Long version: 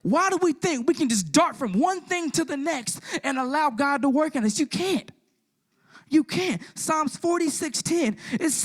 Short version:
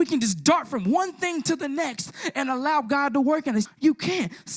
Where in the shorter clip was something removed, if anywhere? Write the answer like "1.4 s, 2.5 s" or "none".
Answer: 3.6 s